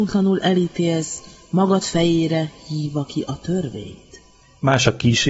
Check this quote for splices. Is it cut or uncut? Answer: uncut